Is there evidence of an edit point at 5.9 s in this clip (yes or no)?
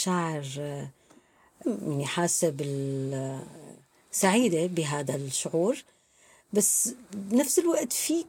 no